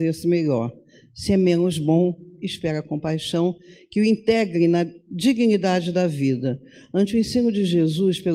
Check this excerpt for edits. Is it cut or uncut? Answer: uncut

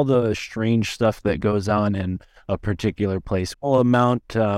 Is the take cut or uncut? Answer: cut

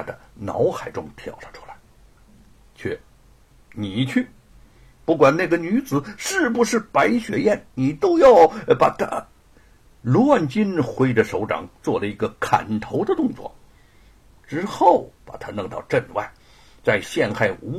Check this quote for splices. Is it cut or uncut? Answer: uncut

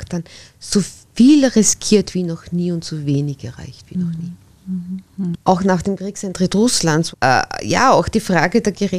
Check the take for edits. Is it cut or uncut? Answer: cut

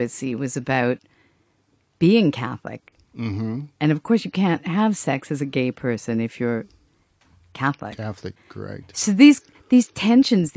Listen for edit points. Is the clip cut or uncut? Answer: cut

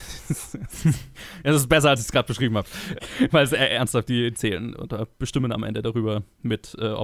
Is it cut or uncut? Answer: cut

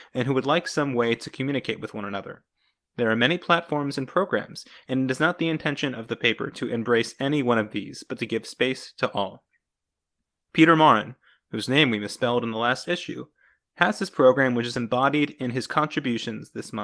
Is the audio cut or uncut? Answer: uncut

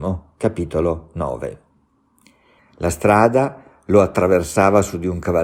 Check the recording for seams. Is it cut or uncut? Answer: cut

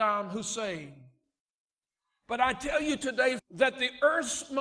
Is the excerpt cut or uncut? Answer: cut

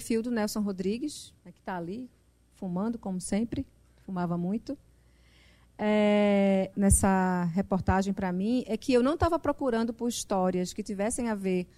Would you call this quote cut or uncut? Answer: cut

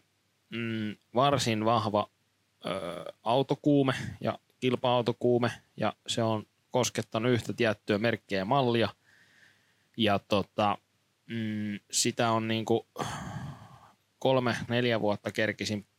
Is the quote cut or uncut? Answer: cut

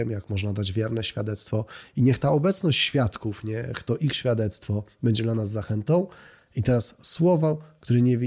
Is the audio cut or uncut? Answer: uncut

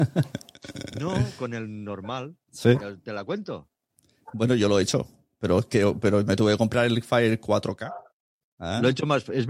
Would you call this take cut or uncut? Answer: cut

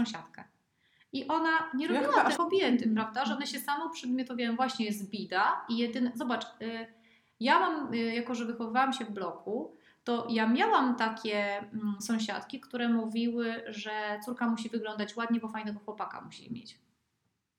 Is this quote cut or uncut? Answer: cut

